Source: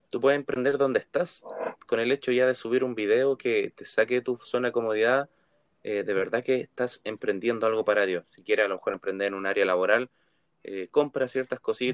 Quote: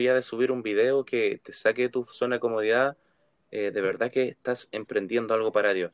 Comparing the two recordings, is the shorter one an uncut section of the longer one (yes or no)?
yes